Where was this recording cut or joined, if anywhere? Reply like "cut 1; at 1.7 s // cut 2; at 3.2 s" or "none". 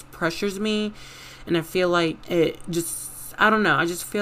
cut 1; at 2.2 s